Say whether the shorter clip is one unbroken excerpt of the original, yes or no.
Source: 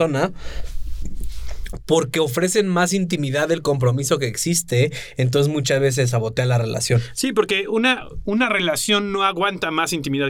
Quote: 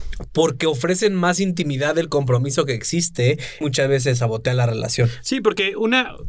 no